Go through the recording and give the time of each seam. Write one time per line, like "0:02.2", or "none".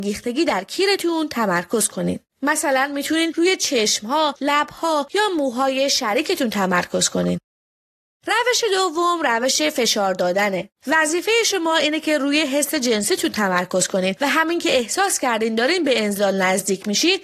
0:10.8

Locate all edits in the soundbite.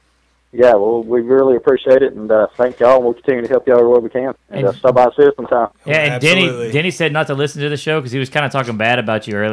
none

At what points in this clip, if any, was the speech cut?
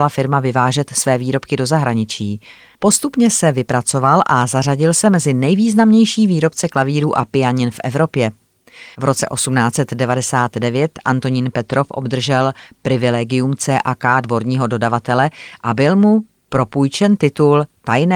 0:02.7
0:08.9

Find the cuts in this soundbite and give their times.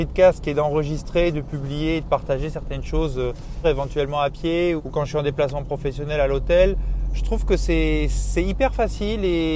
0:03.6
0:04.8

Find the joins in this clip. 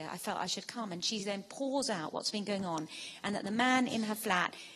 none

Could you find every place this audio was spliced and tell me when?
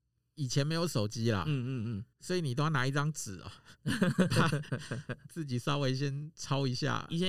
0:02.1
0:05.3

